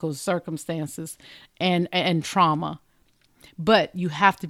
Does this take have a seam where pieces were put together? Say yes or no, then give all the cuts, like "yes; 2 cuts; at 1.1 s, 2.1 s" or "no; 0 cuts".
no; 0 cuts